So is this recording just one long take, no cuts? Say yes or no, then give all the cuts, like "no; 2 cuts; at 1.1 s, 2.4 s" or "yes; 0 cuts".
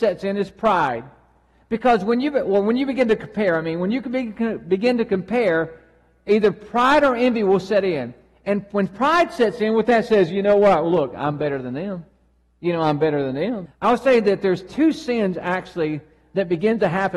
no; 1 cut; at 13.7 s